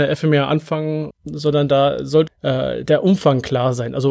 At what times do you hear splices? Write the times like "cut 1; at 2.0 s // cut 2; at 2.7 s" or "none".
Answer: cut 1; at 1.1 s // cut 2; at 2.3 s